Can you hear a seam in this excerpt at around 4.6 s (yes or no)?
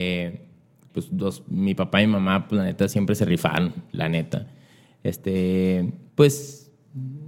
no